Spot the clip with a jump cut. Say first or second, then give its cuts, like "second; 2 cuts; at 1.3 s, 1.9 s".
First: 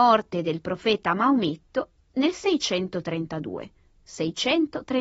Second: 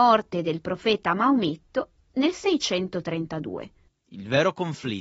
second; 1 cut; at 3.9 s